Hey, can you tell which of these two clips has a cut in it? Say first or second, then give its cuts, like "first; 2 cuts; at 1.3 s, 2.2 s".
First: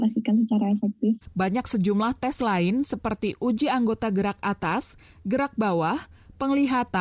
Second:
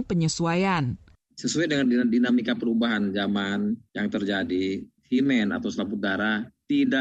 first; 1 cut; at 1.2 s